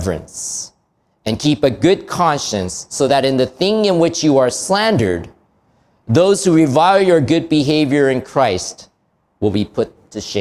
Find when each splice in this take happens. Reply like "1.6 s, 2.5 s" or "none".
none